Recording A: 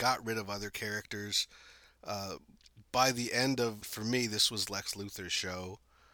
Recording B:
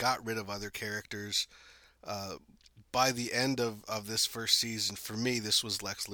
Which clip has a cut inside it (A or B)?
A